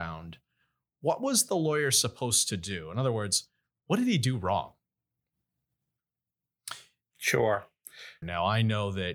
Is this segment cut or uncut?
cut